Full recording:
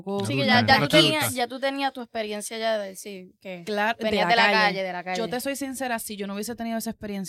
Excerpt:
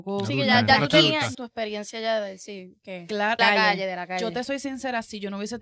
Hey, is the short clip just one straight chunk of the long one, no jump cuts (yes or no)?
no